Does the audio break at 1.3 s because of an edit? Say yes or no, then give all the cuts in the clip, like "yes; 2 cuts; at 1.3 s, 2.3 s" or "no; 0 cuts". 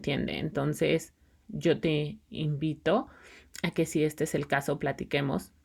yes; 1 cut; at 1.3 s